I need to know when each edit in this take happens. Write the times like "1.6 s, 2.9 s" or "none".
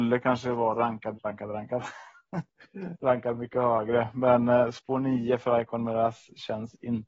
1.1 s